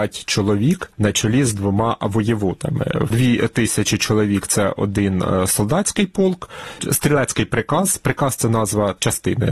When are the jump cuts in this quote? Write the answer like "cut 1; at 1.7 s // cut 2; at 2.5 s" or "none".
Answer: none

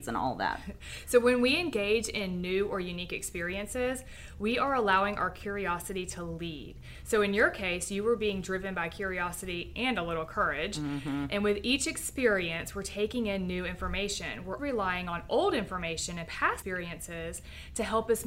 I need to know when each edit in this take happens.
cut 1; at 14.6 s // cut 2; at 16.6 s

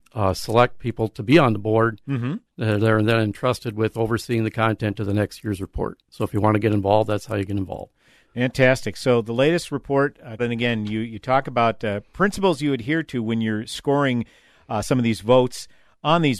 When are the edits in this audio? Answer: cut 1; at 10.4 s

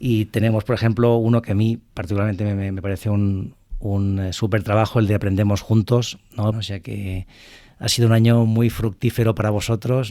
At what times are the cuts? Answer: cut 1; at 6.5 s

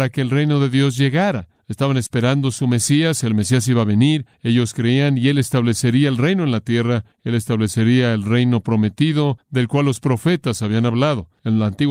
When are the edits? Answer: none

